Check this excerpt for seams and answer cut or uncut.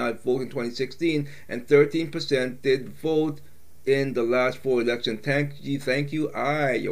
uncut